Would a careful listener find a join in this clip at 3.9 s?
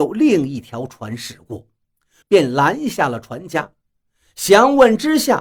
no; 1 cut; at 2.2 s

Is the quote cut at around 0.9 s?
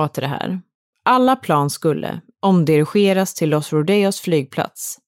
no; 1 cut; at 2.3 s

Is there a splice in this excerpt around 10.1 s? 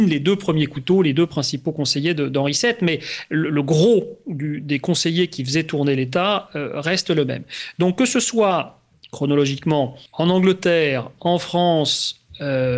yes; 1 cut; at 10.1 s

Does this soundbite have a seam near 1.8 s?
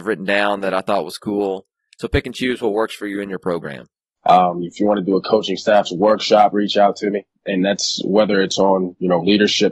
no; 2 cuts; at 4.2 s, 7.4 s

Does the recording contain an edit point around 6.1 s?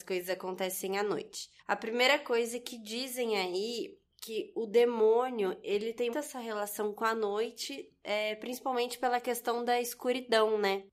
yes; 2 cuts; at 1.6 s, 6.1 s

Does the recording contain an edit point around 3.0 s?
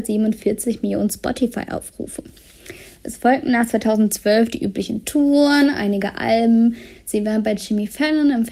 no; 1 cut; at 6.9 s

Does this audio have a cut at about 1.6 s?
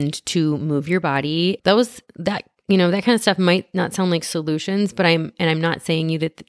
yes; 1 cut; at 1.6 s

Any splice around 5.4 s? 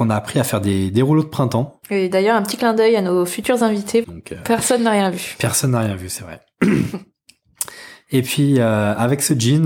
no; 1 cut; at 4.0 s

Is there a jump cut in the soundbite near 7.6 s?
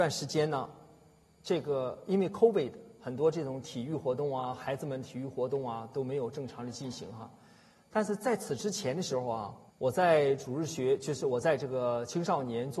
no; 1 cut; at 9.7 s

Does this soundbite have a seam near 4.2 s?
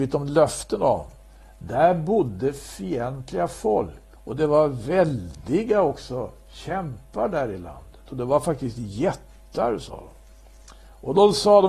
yes; 1 cut; at 4.2 s

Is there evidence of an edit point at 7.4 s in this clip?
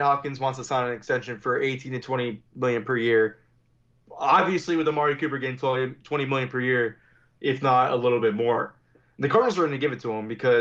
yes; 1 cut; at 7.4 s

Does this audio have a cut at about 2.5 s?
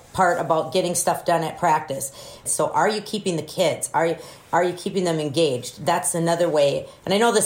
yes; 1 cut; at 2.5 s

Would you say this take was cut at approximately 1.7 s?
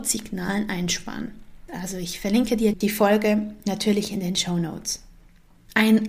yes; 2 cuts; at 1.7 s, 2.7 s

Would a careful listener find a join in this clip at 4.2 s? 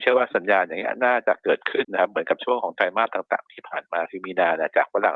no; 1 cut; at 1.8 s

